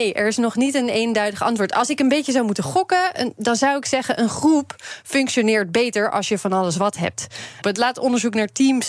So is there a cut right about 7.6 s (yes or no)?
yes